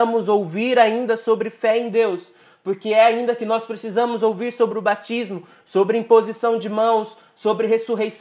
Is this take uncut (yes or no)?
yes